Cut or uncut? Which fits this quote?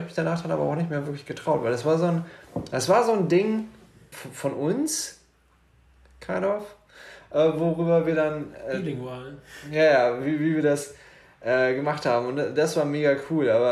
cut